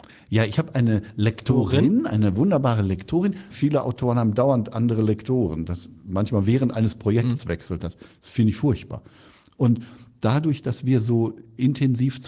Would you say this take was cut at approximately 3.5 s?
yes; 1 cut; at 3.5 s

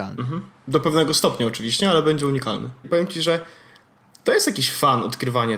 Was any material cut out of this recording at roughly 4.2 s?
no; 1 cut; at 2.8 s

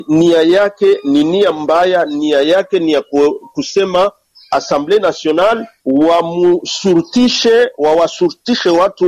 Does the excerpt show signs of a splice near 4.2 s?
no; 0 cuts

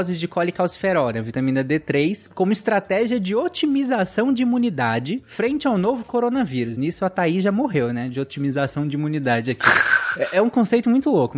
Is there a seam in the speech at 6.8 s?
no; 0 cuts

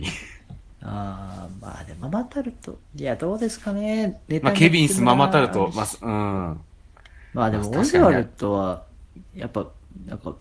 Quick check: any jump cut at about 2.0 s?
yes; 1 cut; at 2.0 s

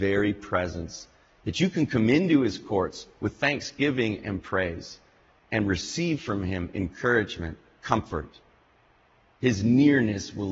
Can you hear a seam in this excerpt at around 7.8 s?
yes; 1 cut; at 7.8 s

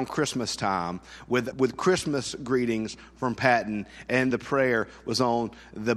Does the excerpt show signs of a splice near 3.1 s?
no; 2 cuts; at 1.5 s, 4.3 s

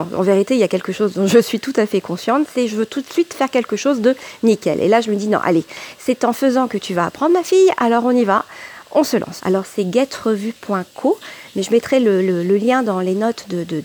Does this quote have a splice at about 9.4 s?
yes; 1 cut; at 9.4 s

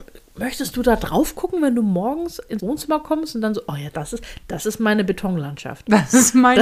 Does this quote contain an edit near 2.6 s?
yes; 1 cut; at 2.6 s

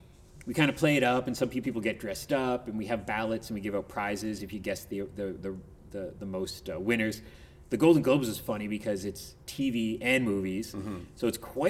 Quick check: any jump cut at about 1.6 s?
yes; 1 cut; at 1.6 s

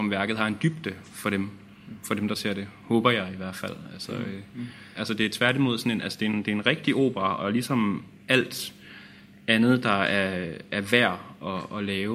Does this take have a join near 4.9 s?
yes; 1 cut; at 4.9 s

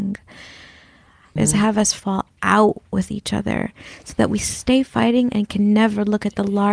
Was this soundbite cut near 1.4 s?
yes; 1 cut; at 1.4 s

